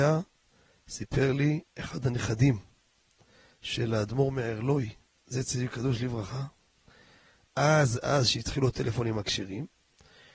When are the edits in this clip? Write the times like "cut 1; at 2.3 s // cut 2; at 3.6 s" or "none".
cut 1; at 8.0 s